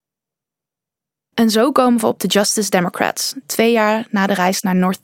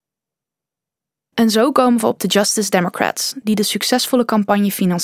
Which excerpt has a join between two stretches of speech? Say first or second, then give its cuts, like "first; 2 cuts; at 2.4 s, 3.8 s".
first; 1 cut; at 3.4 s